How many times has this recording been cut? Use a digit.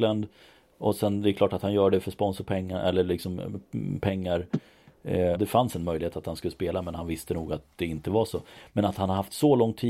1